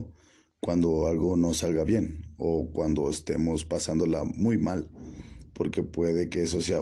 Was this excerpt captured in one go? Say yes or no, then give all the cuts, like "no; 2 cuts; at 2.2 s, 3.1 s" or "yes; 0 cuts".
yes; 0 cuts